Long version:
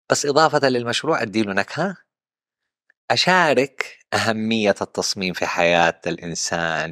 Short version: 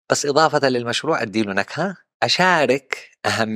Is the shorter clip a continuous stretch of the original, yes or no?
no